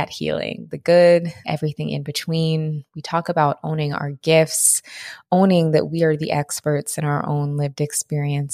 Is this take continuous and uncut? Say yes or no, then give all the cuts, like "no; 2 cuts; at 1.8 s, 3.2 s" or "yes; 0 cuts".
no; 1 cut; at 1.4 s